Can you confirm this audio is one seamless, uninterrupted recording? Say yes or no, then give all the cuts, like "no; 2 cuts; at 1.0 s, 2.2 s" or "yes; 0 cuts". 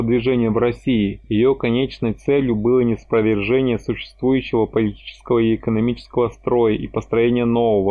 yes; 0 cuts